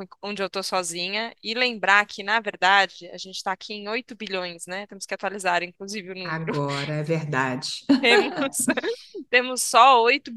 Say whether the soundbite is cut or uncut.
uncut